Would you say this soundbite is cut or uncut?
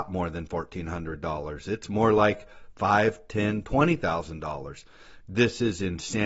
cut